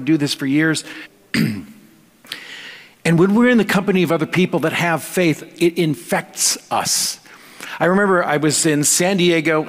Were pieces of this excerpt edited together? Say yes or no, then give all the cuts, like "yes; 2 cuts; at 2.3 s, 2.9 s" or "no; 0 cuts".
yes; 1 cut; at 1.0 s